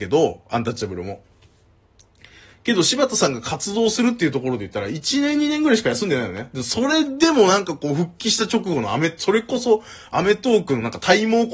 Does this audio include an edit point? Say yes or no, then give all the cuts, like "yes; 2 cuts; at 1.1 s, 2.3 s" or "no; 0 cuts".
no; 0 cuts